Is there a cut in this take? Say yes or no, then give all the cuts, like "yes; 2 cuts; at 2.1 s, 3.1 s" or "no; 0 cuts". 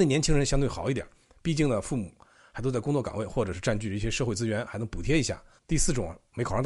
yes; 1 cut; at 5.6 s